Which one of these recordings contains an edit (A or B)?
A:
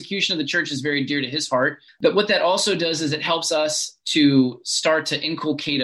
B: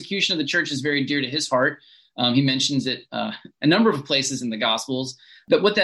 A